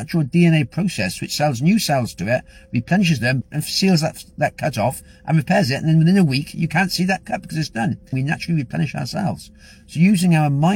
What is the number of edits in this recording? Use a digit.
2